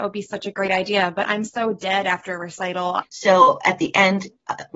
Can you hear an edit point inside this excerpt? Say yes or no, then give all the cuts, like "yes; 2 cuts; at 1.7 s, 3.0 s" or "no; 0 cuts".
yes; 1 cut; at 3.0 s